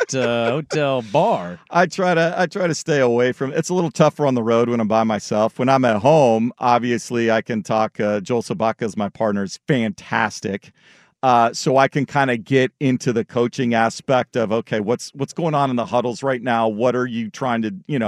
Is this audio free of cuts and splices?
yes; 0 cuts

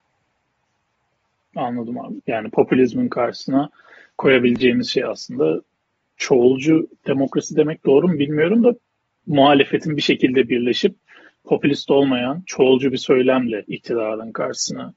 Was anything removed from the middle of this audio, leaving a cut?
yes; 1 cut; at 2.2 s

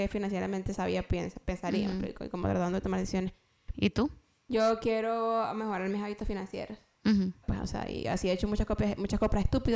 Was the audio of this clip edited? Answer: yes; 2 cuts; at 3.7 s, 7.4 s

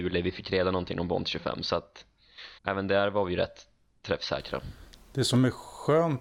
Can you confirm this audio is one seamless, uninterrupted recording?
no; 1 cut; at 2.6 s

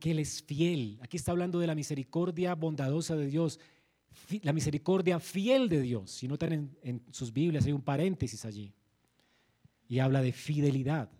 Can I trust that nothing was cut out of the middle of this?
yes; 0 cuts

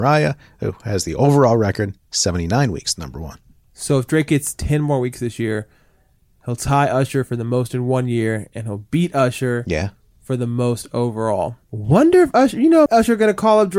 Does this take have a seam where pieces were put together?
yes; 2 cuts; at 11.6 s, 12.9 s

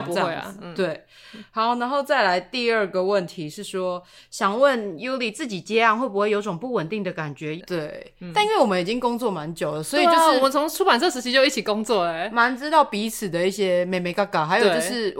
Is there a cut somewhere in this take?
yes; 1 cut; at 7.6 s

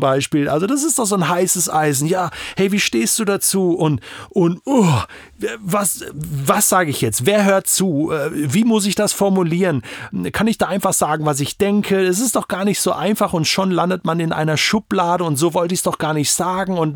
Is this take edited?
no; 0 cuts

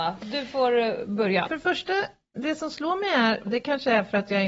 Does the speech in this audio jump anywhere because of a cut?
yes; 2 cuts; at 1.4 s, 3.4 s

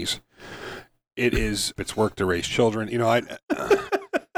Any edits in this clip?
yes; 2 cuts; at 1.8 s, 2.9 s

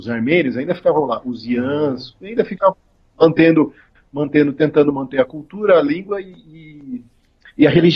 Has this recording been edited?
no; 0 cuts

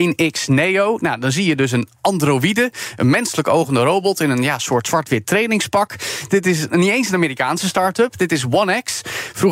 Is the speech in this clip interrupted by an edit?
yes; 1 cut; at 6.3 s

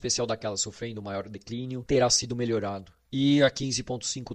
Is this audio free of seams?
yes; 0 cuts

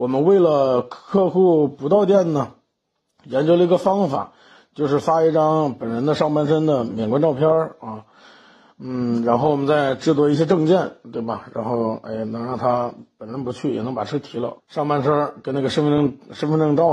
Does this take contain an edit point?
yes; 1 cut; at 14.6 s

